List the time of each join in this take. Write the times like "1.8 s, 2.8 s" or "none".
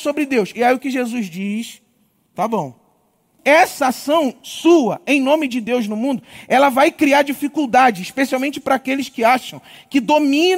3.4 s